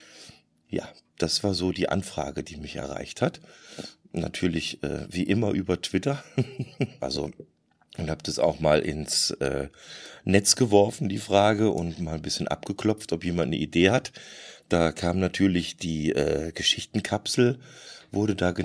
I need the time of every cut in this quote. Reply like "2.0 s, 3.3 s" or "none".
7.0 s